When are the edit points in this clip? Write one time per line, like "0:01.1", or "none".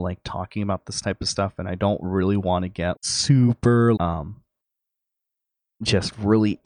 0:03.0
0:04.0